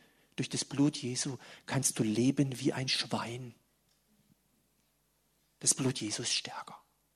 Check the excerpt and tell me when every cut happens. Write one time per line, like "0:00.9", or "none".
none

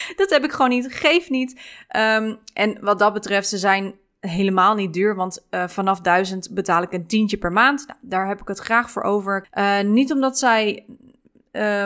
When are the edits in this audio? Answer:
0:09.4

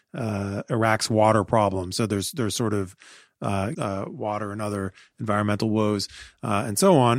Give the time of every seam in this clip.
0:03.7

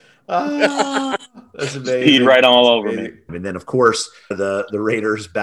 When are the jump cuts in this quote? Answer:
0:03.3

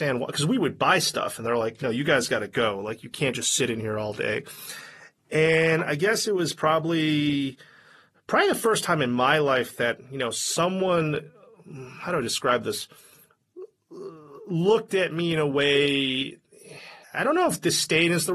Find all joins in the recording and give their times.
0:17.0

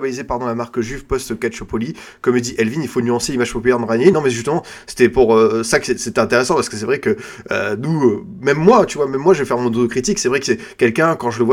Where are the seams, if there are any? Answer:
none

